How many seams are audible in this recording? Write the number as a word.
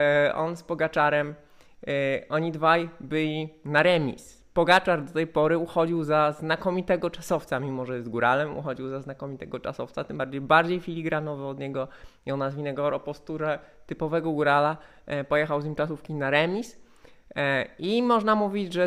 zero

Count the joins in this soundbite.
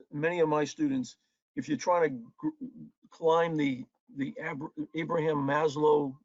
one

